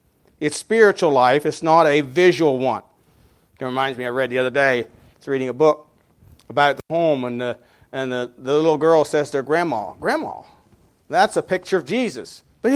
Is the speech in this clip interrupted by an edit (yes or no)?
no